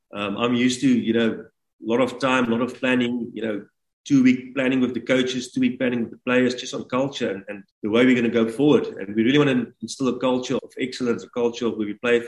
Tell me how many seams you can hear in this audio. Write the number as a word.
two